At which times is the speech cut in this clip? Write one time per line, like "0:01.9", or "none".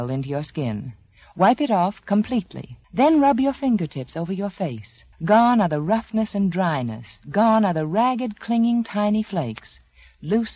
0:02.8
0:05.1